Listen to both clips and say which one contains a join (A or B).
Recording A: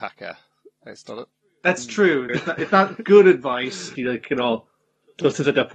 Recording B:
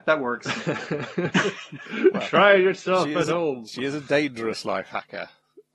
A